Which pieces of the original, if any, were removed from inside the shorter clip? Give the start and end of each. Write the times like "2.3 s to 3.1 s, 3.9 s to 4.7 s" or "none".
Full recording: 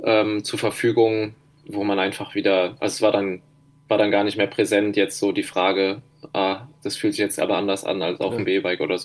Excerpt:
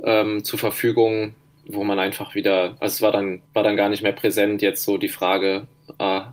3.5 s to 3.8 s